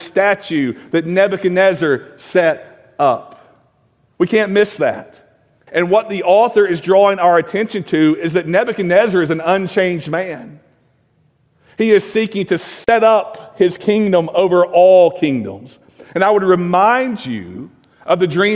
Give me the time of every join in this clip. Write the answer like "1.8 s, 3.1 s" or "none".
5.7 s

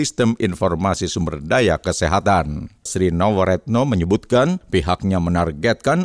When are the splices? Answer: 2.9 s

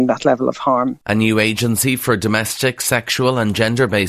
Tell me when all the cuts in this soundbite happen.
1.0 s

